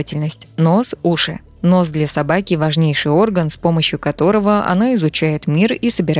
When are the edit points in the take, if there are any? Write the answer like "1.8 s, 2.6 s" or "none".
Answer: 1.0 s